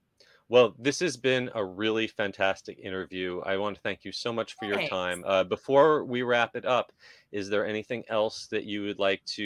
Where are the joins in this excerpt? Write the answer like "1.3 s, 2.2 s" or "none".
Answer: none